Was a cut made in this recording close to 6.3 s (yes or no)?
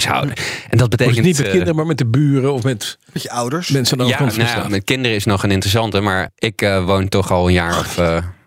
yes